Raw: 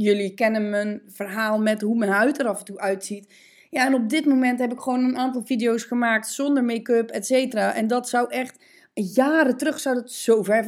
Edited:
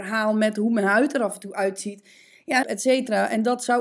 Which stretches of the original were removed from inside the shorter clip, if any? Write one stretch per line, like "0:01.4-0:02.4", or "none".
0:03.9-0:07.1